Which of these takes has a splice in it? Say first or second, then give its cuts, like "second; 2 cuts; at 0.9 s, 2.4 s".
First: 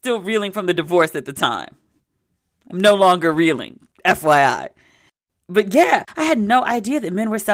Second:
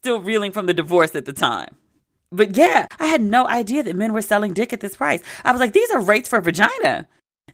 second; 1 cut; at 2.2 s